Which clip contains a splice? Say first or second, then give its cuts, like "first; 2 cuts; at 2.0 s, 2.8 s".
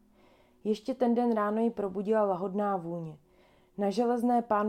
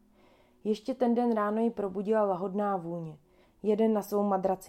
second; 1 cut; at 3.4 s